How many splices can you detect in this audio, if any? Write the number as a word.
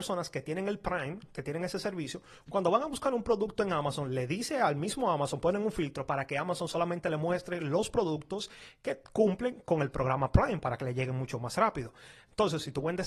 zero